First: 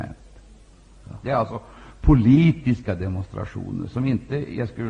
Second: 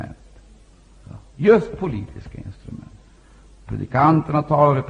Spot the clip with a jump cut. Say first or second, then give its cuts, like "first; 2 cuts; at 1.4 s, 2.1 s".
first; 1 cut; at 1.2 s